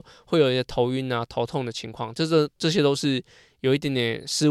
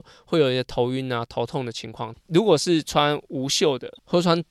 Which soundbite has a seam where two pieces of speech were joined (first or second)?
second